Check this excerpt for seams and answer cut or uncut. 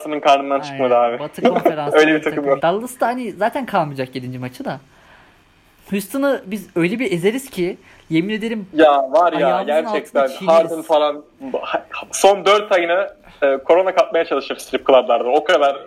cut